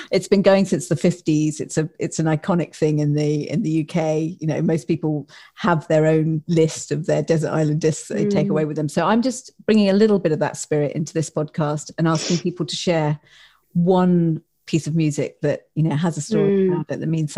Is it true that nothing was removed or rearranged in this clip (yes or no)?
yes